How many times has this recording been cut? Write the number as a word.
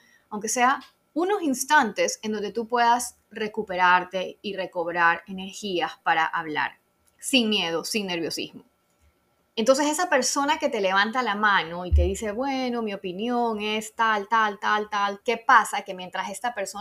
two